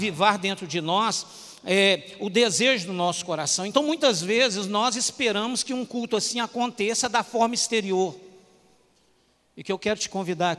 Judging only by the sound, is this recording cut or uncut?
uncut